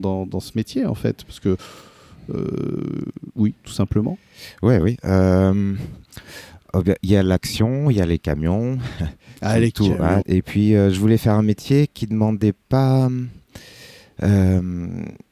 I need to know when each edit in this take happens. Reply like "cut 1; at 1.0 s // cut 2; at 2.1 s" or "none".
cut 1; at 10.2 s